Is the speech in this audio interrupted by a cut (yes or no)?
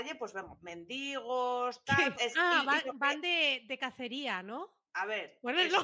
yes